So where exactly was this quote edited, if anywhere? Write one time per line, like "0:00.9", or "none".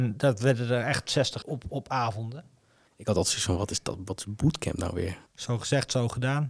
0:01.4
0:02.9
0:05.3